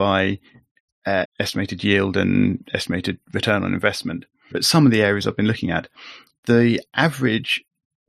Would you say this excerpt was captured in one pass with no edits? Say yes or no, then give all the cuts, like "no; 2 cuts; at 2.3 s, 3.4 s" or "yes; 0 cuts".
no; 2 cuts; at 1.2 s, 4.5 s